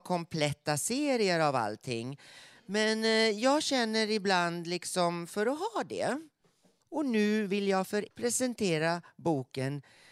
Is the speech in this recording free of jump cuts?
no; 2 cuts; at 6.8 s, 8.1 s

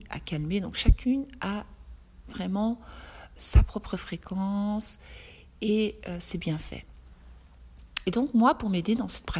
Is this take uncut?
no; 1 cut; at 3.4 s

